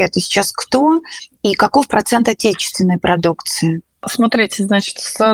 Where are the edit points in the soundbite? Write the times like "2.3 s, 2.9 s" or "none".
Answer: none